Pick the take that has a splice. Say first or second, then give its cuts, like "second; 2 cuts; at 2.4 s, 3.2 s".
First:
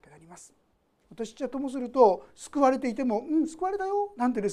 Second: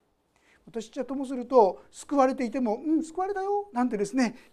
first; 1 cut; at 1.0 s